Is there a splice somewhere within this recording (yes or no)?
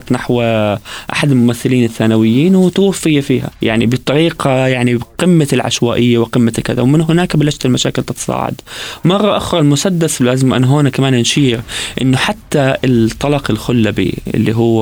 yes